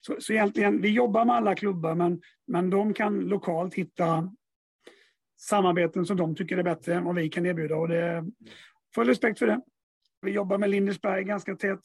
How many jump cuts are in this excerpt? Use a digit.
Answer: 1